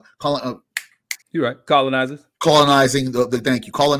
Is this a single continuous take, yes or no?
no